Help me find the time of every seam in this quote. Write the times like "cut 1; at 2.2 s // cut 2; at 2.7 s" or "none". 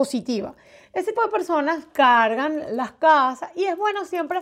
cut 1; at 1.1 s